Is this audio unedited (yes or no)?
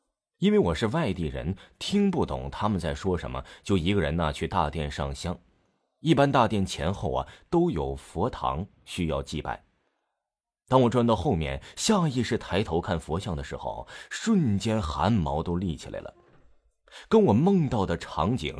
yes